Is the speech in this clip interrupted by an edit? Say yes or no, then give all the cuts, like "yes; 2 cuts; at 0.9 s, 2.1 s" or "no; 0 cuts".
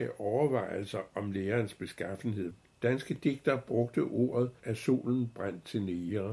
yes; 2 cuts; at 2.7 s, 4.6 s